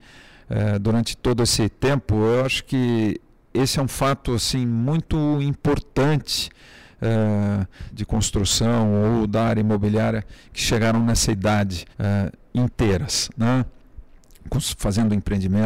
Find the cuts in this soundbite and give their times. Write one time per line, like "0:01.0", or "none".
0:07.9
0:11.9